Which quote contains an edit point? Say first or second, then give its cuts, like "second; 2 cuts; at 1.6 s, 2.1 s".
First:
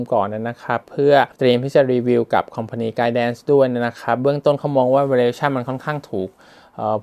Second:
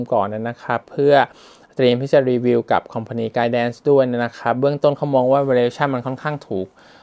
first; 1 cut; at 1.3 s